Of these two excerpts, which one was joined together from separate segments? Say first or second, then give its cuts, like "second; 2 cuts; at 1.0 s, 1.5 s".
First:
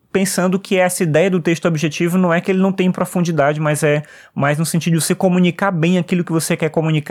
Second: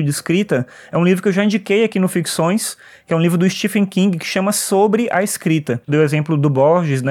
second; 1 cut; at 5.9 s